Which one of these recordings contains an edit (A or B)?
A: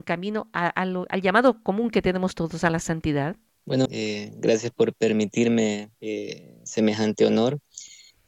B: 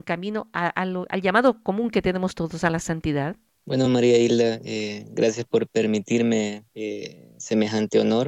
A